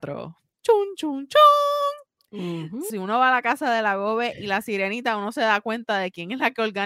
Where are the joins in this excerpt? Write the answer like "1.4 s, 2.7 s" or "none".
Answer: 2.9 s